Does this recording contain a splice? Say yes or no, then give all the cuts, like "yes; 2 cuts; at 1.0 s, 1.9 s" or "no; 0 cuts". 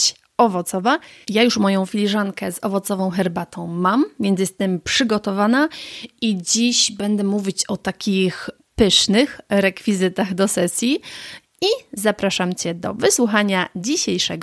yes; 3 cuts; at 1.2 s, 8.6 s, 11.4 s